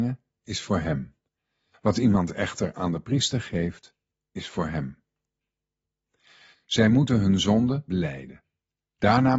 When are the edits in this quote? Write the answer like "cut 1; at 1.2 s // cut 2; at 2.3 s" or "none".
cut 1; at 1.7 s // cut 2; at 6.5 s // cut 3; at 7.9 s